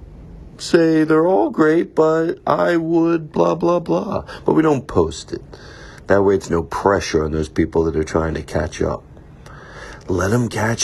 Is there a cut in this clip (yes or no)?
no